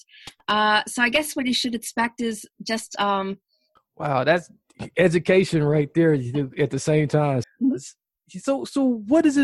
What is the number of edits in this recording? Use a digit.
2